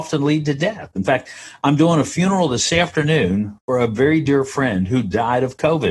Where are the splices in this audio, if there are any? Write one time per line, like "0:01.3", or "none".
none